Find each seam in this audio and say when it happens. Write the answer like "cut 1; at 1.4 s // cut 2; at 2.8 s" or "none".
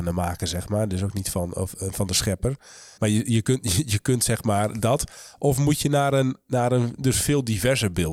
cut 1; at 3.0 s